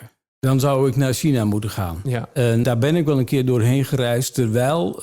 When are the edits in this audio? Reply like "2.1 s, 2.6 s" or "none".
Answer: 2.6 s